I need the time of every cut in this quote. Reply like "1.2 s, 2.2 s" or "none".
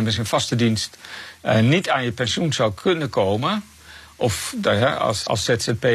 none